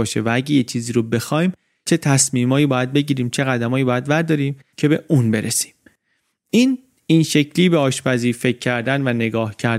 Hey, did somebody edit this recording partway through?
no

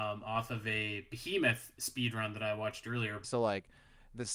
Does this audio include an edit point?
yes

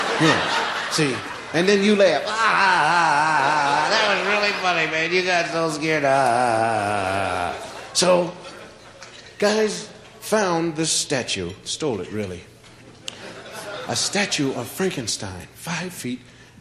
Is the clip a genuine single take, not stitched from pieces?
yes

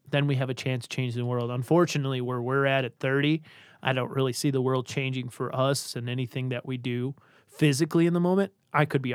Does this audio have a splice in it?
no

